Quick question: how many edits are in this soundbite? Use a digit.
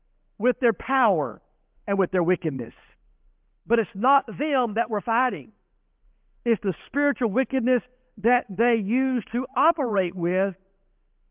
1